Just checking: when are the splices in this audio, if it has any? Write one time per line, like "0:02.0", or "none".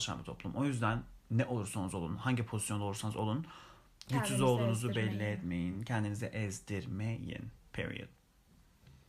none